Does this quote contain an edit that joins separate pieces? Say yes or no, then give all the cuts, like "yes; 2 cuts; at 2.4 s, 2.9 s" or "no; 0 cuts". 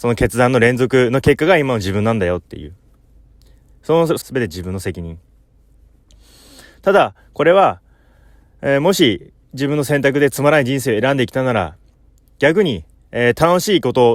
yes; 1 cut; at 4.2 s